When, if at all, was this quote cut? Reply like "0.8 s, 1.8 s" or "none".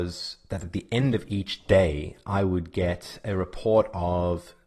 none